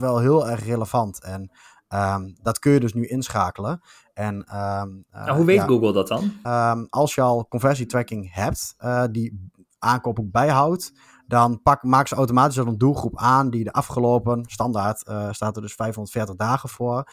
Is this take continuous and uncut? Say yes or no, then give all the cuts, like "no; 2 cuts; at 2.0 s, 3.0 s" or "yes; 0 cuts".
no; 1 cut; at 6.4 s